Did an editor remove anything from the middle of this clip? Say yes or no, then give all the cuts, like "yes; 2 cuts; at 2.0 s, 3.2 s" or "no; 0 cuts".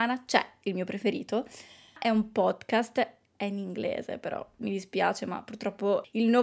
no; 0 cuts